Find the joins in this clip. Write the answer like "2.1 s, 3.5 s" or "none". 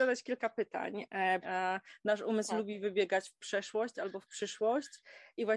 1.4 s